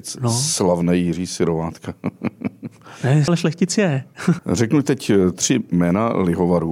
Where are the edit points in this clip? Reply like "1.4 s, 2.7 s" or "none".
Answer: 3.3 s, 4.4 s

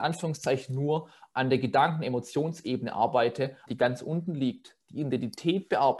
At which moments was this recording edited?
3.7 s

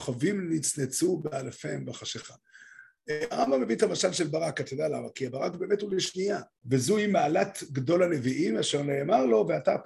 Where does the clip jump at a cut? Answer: 6.6 s

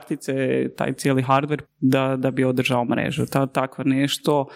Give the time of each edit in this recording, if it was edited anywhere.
1.6 s

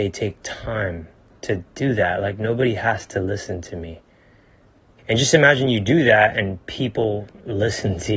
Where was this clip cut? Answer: 5.0 s

